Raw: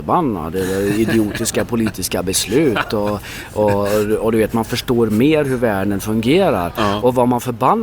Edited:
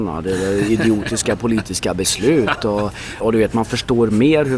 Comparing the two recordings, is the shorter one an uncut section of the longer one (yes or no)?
no